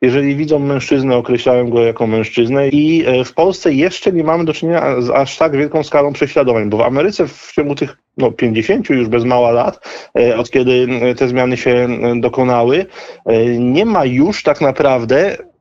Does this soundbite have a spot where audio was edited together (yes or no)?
yes